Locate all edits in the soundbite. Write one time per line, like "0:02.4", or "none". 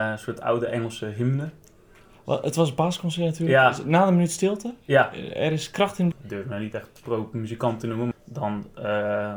0:06.1
0:08.1